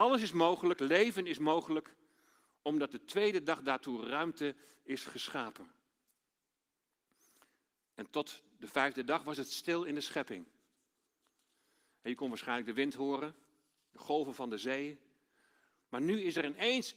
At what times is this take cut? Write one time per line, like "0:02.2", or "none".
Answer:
none